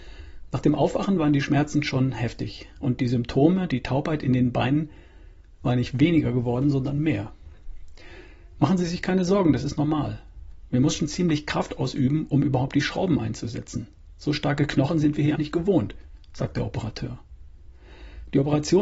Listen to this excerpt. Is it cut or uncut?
cut